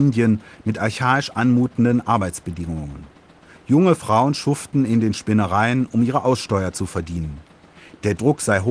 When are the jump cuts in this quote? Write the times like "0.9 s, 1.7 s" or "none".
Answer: none